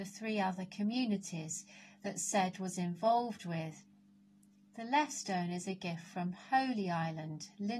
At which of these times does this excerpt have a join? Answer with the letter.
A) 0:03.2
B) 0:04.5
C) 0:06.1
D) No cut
D